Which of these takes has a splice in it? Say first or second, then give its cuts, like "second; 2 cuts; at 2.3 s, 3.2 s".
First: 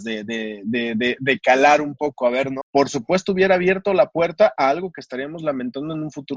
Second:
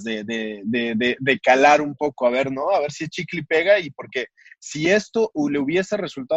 first; 1 cut; at 2.6 s